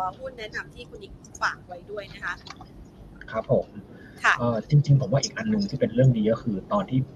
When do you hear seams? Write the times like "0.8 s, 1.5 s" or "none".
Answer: none